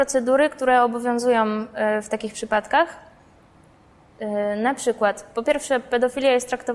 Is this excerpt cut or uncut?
uncut